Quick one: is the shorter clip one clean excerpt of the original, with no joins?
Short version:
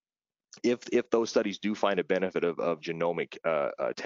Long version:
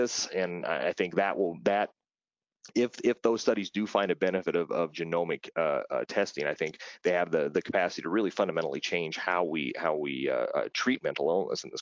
yes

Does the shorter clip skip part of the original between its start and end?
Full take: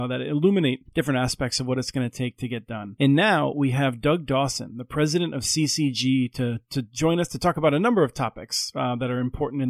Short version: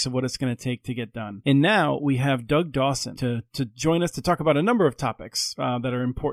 yes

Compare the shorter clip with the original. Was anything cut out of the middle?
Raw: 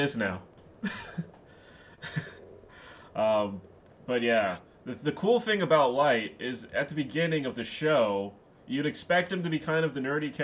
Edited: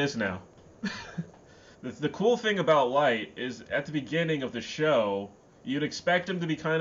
yes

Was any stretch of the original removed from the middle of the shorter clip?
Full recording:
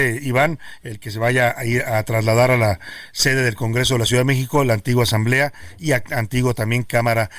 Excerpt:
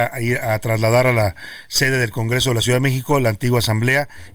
no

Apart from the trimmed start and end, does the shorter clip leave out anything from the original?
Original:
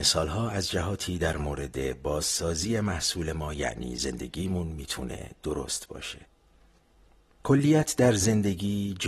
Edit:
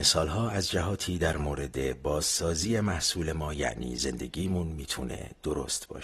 no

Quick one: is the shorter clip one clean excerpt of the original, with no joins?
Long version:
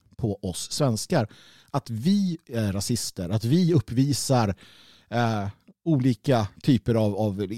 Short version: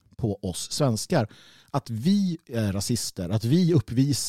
yes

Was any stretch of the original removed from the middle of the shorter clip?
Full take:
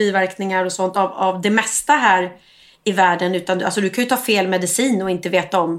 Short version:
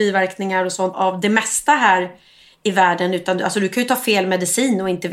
yes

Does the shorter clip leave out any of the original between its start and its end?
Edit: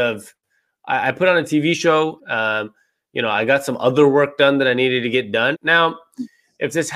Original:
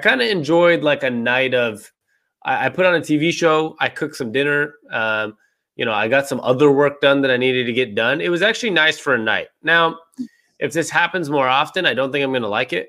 yes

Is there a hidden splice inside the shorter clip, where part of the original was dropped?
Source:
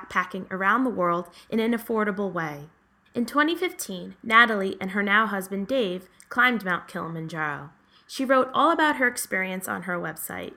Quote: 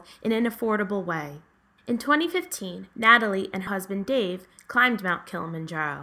yes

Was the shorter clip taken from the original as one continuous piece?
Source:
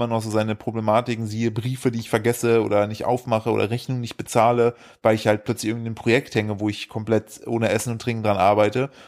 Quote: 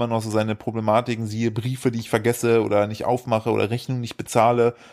yes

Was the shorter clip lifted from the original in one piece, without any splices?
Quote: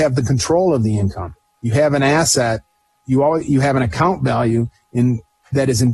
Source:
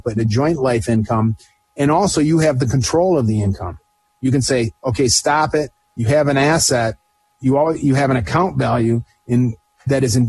no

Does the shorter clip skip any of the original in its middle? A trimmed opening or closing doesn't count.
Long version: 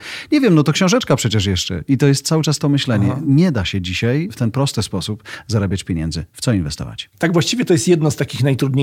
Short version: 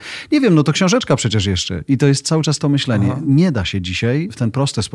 no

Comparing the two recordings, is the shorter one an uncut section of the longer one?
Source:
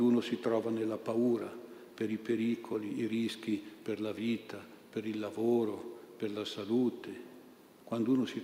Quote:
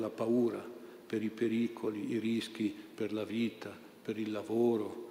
yes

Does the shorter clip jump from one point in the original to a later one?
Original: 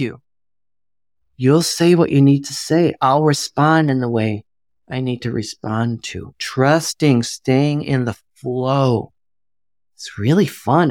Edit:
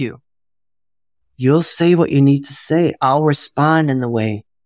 no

